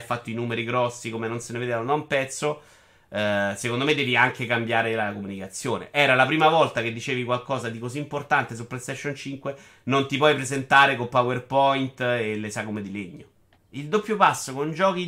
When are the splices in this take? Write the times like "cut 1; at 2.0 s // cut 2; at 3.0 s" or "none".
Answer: cut 1; at 13.5 s